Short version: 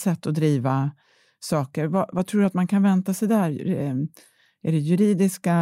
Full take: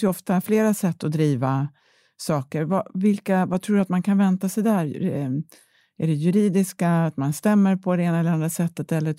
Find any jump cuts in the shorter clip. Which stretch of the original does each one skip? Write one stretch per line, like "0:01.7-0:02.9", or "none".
0:02.9-0:03.5